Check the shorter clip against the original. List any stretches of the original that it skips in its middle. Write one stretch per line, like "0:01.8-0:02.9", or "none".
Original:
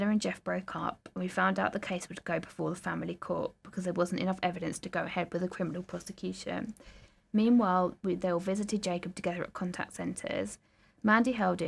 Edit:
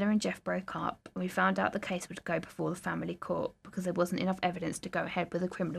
none